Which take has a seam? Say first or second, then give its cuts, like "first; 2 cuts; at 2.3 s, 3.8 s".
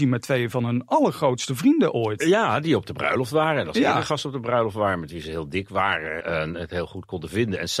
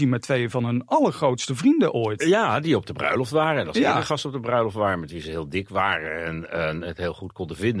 first; 1 cut; at 6.2 s